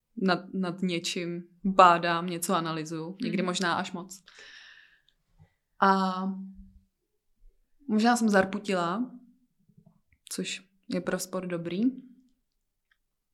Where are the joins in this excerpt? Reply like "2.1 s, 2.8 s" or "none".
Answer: none